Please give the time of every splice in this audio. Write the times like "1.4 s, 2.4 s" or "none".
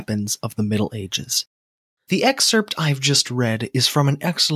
2.0 s